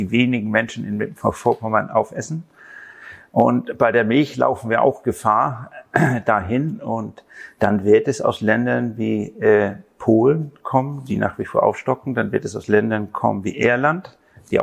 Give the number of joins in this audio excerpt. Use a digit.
0